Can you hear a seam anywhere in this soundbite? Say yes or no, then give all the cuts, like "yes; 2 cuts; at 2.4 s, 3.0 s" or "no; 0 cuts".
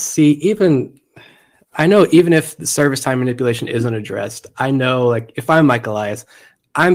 no; 0 cuts